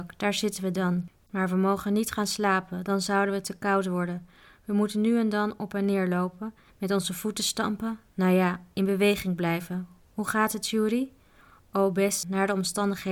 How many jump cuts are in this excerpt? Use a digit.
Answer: 1